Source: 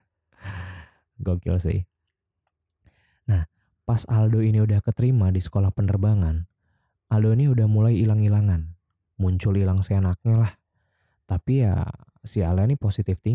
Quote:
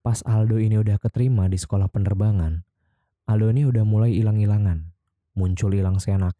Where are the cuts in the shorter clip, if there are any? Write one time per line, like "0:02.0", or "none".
none